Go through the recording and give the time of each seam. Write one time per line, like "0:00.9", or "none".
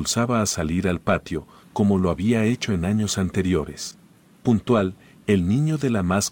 0:01.6